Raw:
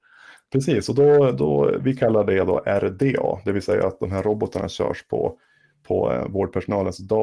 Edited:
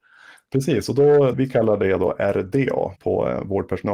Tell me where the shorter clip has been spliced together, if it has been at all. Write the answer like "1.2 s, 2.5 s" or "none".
1.3 s, 3.0 s